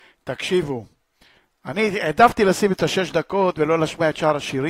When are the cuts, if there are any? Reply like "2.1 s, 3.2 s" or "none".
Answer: none